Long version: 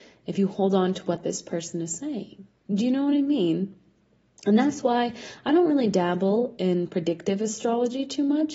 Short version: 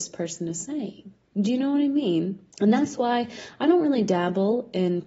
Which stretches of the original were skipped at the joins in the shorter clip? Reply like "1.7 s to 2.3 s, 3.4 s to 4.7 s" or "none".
3.8 s to 4.4 s